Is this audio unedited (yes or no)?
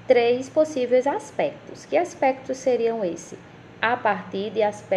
no